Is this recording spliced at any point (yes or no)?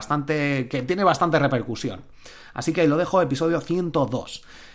no